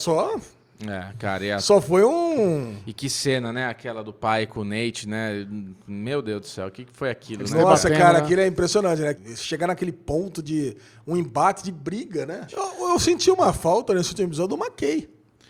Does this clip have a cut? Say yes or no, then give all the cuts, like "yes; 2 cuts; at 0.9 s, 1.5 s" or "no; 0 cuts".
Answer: yes; 2 cuts; at 9.1 s, 12.5 s